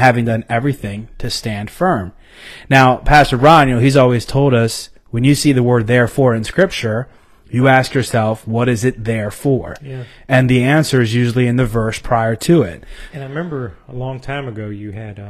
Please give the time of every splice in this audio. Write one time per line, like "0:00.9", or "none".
0:13.1